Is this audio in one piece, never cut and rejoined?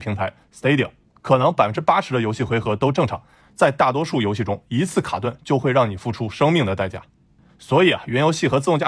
no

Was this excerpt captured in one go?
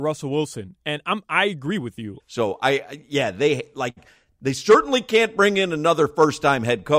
no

